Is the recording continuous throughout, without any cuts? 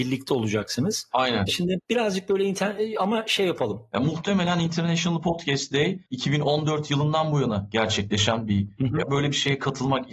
no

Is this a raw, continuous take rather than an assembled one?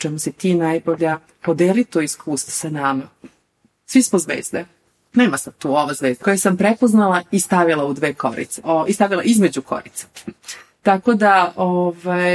no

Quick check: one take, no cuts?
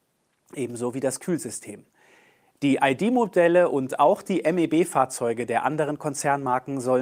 yes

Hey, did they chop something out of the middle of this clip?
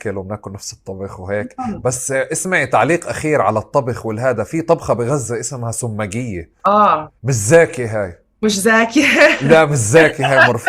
yes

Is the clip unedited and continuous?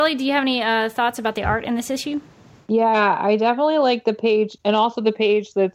yes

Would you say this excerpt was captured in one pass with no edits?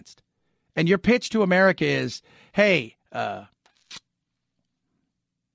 yes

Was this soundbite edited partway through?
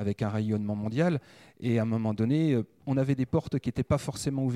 no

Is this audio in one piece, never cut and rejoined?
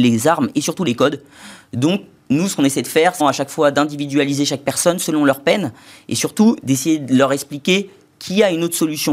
no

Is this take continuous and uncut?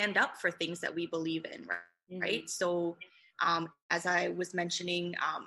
yes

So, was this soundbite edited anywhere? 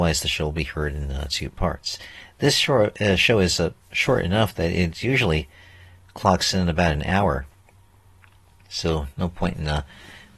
no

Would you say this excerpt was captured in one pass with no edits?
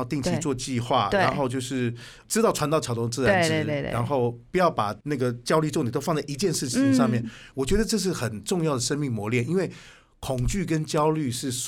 yes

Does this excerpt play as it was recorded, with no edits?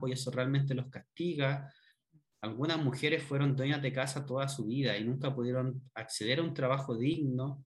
yes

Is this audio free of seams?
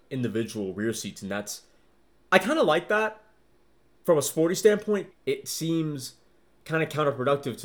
no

